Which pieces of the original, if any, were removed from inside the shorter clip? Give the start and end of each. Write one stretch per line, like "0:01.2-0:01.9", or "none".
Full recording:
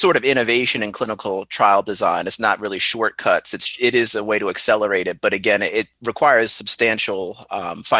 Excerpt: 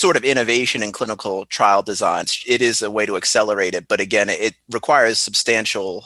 0:02.2-0:03.6